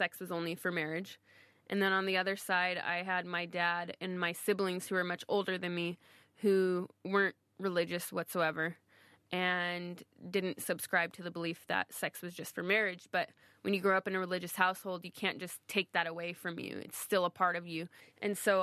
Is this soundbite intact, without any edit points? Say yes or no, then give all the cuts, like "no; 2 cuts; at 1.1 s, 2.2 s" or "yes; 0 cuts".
yes; 0 cuts